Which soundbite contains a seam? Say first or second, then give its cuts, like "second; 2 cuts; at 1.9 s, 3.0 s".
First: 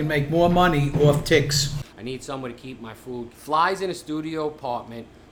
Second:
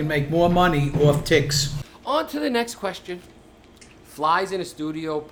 first; 2 cuts; at 1.9 s, 3.3 s